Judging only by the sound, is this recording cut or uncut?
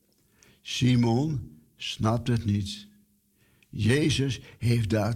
uncut